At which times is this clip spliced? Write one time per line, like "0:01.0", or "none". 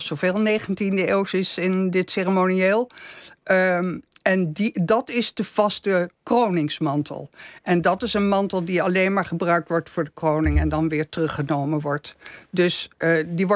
none